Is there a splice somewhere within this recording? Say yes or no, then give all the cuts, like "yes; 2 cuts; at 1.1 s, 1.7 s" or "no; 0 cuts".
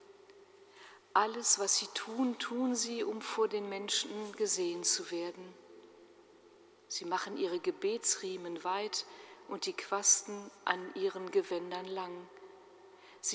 no; 0 cuts